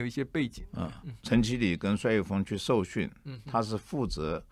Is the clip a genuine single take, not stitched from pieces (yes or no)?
no